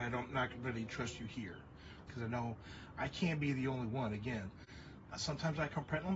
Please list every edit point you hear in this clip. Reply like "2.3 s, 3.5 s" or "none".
2.1 s, 5.1 s